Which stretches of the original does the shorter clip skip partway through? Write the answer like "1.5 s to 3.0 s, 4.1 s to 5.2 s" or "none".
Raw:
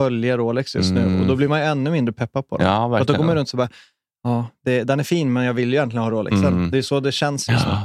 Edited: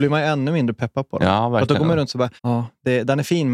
3.7 s to 4.2 s